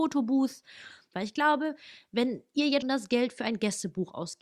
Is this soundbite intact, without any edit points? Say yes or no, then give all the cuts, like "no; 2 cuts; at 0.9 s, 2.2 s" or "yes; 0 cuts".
no; 2 cuts; at 1.1 s, 2.8 s